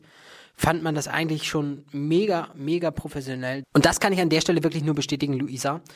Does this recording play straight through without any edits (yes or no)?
no